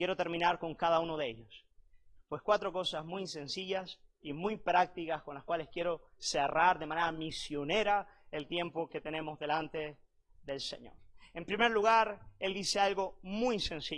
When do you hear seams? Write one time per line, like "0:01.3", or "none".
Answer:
0:02.2

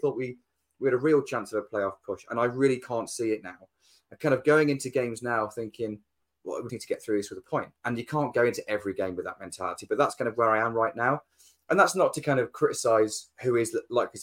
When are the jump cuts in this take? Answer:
0:06.7

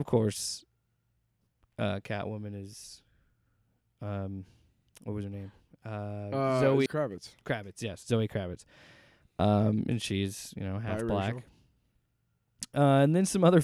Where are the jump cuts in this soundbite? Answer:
0:06.9

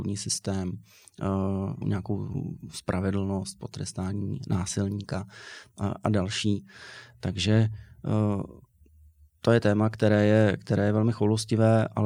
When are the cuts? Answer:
0:01.8

